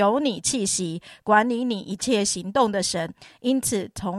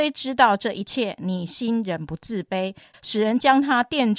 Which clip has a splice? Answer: second; 1 cut; at 2.9 s

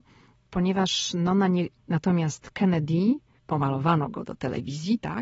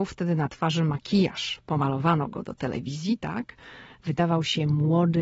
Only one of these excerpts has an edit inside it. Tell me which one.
first; 2 cuts; at 1.8 s, 3.4 s

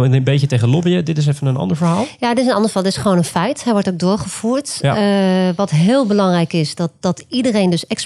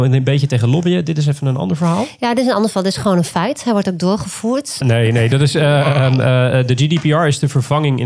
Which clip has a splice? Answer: second; 1 cut; at 4.8 s

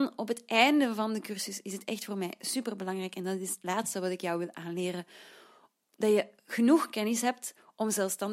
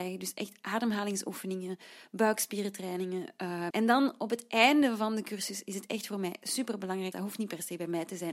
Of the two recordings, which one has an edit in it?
second; 2 cuts; at 3.7 s, 7.1 s

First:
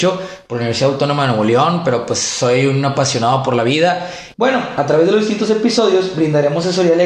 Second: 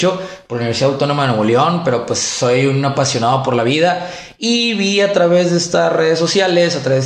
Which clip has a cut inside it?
first; 1 cut; at 4.3 s

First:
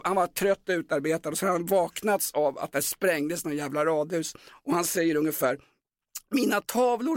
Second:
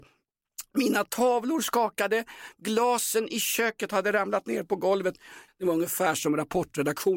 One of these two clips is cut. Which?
second; 1 cut; at 5.5 s

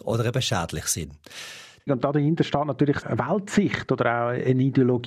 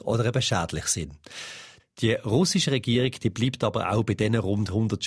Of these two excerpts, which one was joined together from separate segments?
first; 2 cuts; at 1.9 s, 3.0 s

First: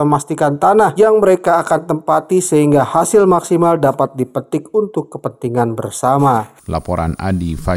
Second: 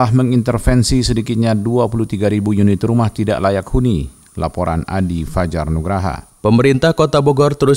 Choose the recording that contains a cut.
first; 1 cut; at 6.6 s

